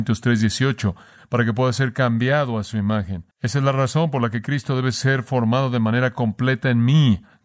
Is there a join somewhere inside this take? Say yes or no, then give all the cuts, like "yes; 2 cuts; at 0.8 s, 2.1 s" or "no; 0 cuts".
yes; 1 cut; at 3.3 s